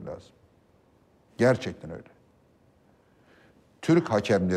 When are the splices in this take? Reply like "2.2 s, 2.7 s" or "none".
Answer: none